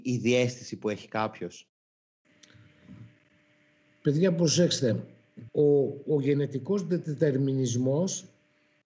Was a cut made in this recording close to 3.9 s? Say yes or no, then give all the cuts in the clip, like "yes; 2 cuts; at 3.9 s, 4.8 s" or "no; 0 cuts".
no; 1 cut; at 5.5 s